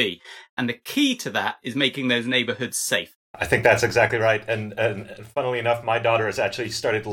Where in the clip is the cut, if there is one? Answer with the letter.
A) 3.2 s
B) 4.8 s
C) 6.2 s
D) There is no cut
A